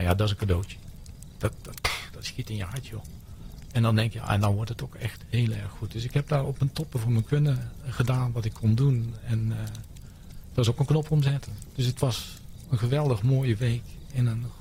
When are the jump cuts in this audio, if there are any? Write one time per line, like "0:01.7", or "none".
none